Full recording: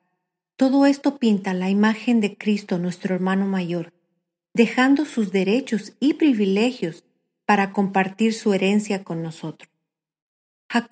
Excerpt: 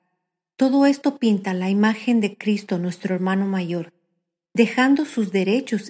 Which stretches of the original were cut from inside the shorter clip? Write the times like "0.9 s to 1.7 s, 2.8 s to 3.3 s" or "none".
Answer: none